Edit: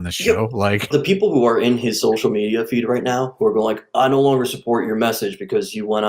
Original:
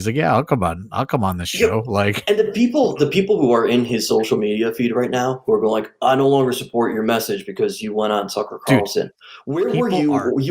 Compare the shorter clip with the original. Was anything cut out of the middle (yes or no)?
yes